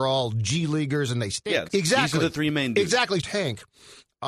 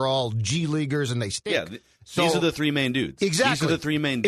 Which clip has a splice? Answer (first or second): first